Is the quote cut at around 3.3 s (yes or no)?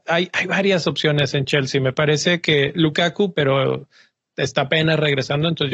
yes